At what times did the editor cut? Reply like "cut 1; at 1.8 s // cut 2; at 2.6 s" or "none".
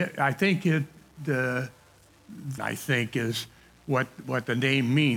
cut 1; at 2.6 s